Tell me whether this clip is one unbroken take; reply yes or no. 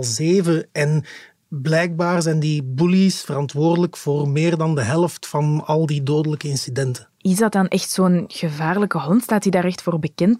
yes